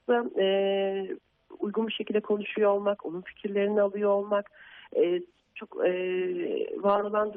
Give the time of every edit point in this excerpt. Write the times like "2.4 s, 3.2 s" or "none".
none